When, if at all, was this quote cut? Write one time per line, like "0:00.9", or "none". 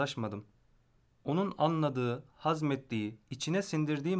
0:03.2